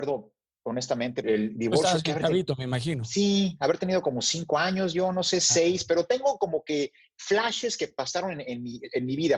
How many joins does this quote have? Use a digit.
1